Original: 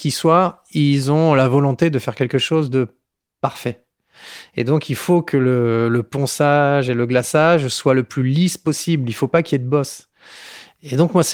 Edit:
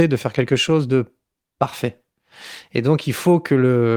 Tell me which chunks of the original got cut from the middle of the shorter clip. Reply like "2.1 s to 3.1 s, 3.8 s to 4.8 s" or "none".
none